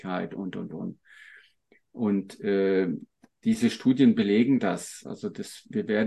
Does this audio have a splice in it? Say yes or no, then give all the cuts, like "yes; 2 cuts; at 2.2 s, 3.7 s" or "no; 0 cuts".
no; 0 cuts